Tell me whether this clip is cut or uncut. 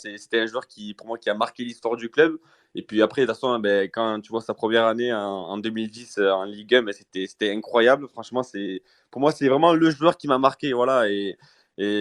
uncut